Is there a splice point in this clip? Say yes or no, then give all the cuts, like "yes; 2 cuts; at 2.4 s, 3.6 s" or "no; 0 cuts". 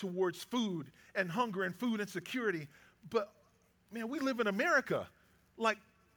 yes; 1 cut; at 3.0 s